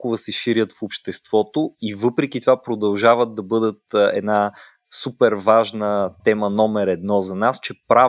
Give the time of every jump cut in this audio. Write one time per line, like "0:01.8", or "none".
0:06.2